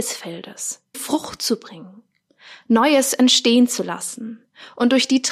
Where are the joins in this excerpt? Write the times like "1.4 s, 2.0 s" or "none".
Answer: 0.9 s